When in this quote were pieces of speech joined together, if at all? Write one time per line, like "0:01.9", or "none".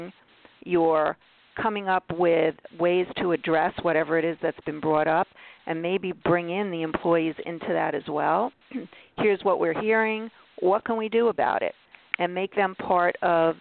none